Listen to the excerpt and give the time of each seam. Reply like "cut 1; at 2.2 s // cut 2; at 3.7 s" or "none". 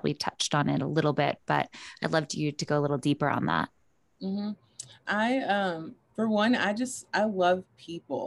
none